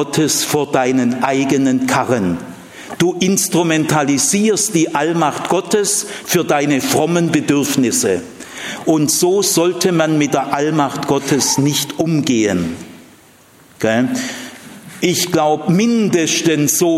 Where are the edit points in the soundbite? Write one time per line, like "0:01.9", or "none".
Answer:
none